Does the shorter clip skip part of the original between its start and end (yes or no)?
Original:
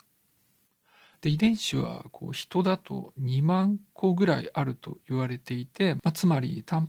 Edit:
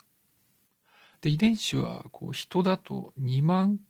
no